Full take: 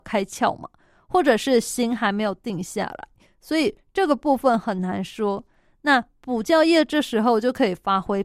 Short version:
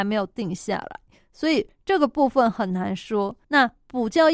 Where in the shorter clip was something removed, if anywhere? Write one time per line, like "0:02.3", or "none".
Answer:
0:03.4